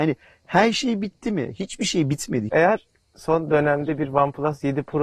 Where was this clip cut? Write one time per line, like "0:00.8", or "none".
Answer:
0:02.5